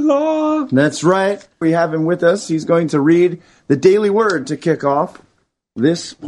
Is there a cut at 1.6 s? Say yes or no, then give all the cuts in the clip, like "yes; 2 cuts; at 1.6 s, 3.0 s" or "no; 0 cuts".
yes; 1 cut; at 1.6 s